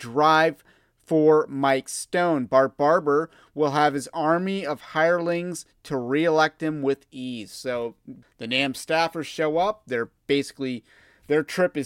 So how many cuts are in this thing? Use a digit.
1